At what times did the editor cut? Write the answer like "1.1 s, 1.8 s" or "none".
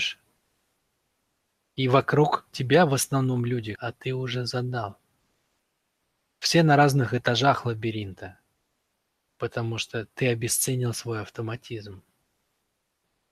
3.8 s, 9.3 s